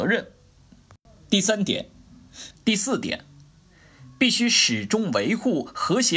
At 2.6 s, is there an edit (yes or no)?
yes